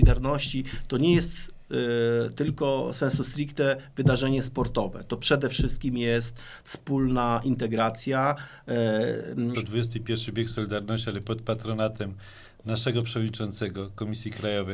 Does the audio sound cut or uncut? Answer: cut